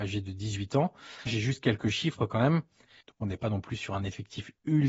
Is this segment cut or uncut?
cut